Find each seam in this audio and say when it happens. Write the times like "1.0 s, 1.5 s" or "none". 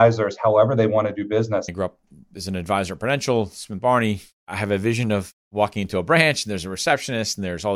1.7 s